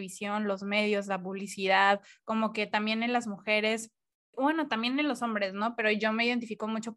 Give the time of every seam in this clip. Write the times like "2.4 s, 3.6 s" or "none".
none